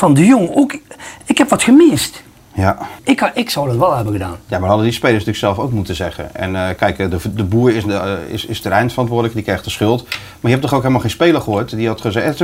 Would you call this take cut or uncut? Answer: cut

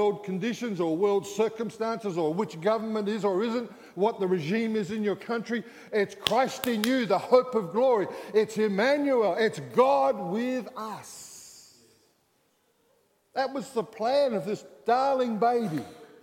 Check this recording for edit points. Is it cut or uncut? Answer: uncut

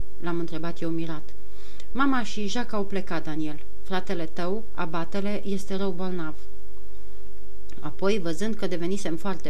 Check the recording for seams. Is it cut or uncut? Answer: cut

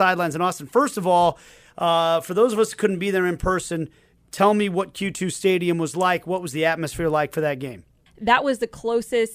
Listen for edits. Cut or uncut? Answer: cut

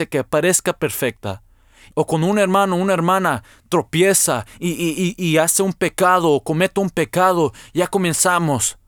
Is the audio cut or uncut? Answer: uncut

